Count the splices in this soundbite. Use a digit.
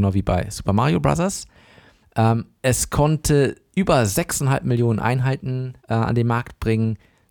2